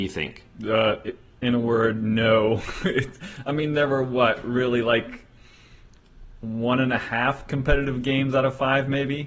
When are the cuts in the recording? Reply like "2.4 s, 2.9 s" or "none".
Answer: none